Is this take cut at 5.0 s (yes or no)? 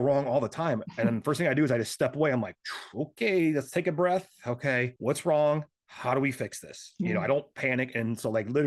yes